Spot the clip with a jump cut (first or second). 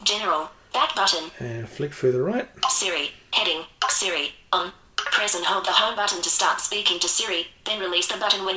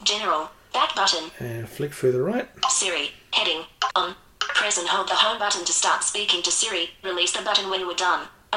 second